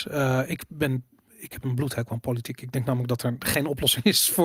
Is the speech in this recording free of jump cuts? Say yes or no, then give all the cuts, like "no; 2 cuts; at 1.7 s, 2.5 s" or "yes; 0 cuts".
yes; 0 cuts